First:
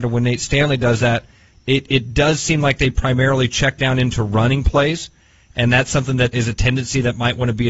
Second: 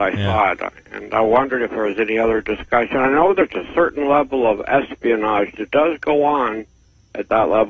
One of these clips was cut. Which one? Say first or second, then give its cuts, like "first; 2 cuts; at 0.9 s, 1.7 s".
first; 1 cut; at 6.3 s